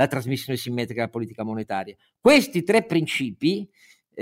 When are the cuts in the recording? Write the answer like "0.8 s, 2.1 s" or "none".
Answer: none